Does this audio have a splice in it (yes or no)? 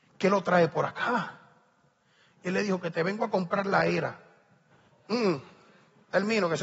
yes